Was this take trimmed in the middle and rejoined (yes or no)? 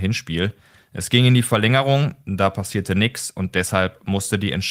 no